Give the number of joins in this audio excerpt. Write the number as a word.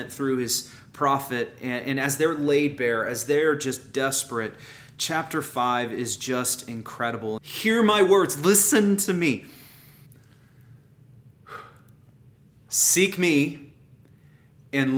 two